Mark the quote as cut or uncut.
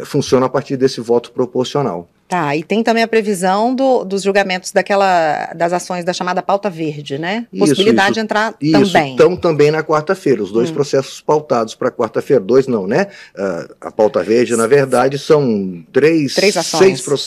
uncut